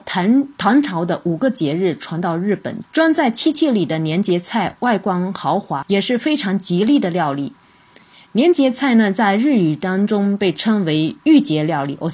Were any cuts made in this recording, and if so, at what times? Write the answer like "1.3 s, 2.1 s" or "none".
2.8 s, 5.8 s